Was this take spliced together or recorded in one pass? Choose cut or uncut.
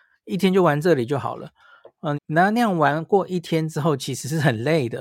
cut